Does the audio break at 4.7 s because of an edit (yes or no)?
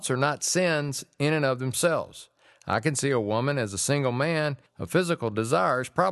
yes